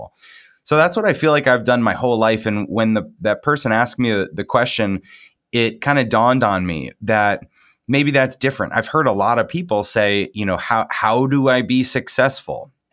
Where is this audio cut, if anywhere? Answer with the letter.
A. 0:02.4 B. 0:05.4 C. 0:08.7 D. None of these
D